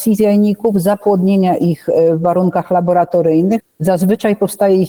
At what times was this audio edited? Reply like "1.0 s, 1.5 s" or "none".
3.6 s